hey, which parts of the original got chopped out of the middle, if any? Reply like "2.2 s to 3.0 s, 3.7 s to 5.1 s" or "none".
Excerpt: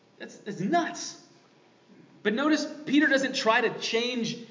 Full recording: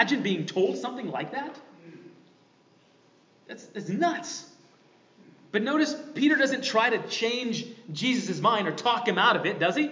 none